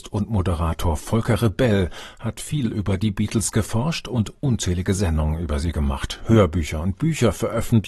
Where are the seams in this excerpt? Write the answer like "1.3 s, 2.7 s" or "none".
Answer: none